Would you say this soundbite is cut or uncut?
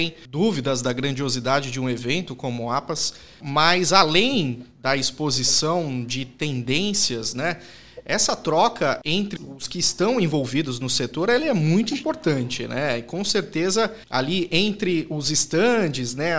uncut